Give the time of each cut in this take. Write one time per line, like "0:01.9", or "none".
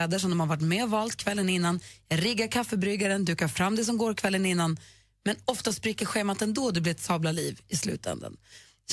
none